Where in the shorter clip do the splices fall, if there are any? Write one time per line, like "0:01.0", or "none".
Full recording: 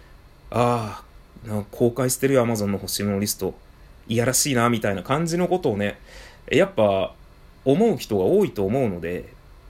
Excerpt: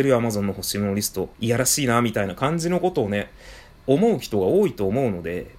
0:01.3
0:03.7